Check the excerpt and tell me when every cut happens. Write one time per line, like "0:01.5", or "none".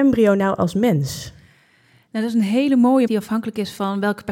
0:03.1